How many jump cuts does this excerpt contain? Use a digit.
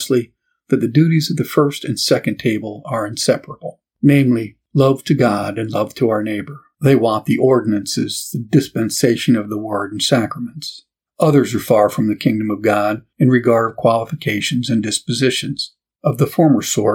1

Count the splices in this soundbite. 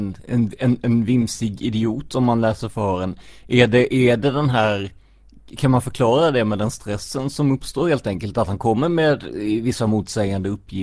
0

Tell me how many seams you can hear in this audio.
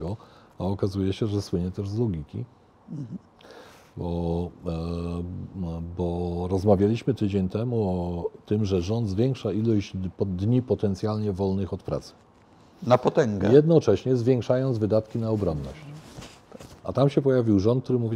1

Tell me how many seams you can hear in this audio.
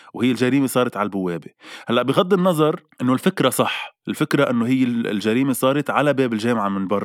1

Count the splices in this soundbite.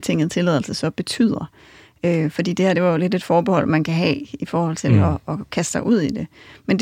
0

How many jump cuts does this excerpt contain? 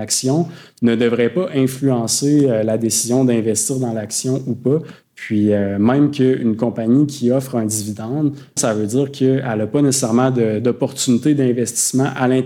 2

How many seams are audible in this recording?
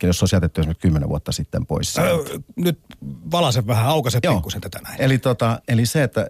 1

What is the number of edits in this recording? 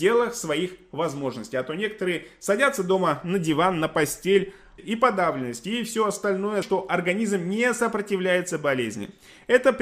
2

